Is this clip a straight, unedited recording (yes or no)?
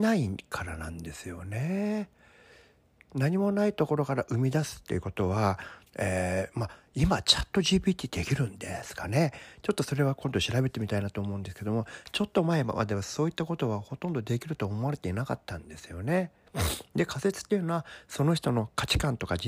yes